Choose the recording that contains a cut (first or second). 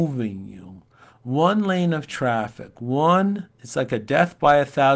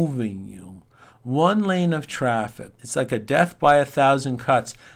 second